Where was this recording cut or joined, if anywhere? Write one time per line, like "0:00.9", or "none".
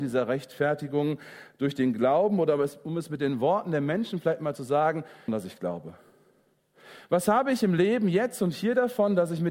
0:05.3

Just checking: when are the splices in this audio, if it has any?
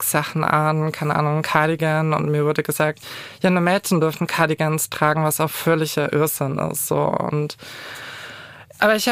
none

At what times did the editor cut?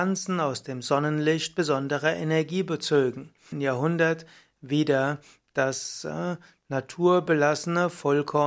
0:03.5

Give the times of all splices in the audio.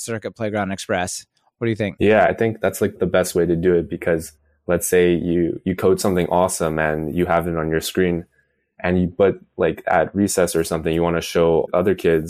0:01.5

